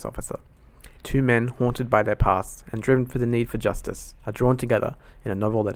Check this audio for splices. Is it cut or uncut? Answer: cut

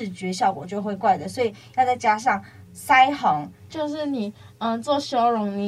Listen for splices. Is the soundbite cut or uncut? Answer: cut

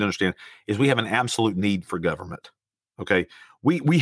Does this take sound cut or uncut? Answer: uncut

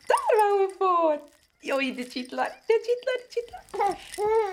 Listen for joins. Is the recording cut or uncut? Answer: uncut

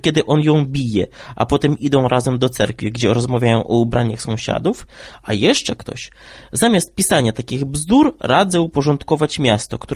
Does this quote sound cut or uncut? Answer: uncut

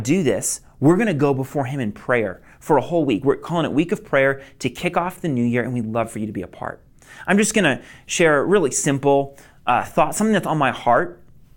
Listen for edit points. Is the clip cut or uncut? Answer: uncut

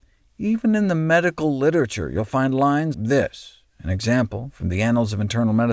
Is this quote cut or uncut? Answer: cut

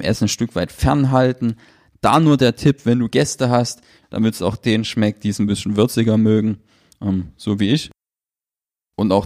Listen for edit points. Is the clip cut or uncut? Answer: cut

